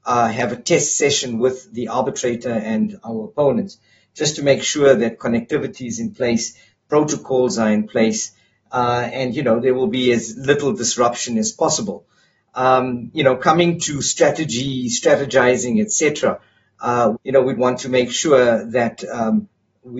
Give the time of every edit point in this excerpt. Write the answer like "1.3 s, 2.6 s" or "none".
17.1 s